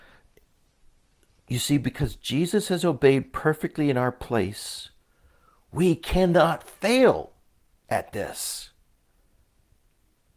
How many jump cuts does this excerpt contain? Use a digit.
0